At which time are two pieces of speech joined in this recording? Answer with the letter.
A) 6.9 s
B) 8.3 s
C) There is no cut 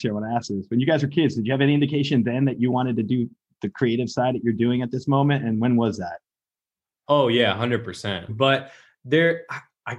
B